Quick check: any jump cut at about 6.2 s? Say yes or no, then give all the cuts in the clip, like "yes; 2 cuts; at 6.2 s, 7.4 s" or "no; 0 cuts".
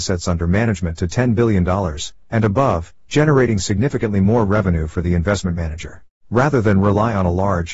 yes; 1 cut; at 6.2 s